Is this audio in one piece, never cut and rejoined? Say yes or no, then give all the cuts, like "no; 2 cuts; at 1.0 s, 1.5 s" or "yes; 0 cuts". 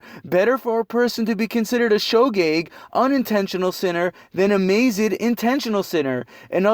yes; 0 cuts